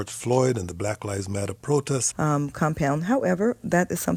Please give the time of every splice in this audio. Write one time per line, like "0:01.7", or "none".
0:02.1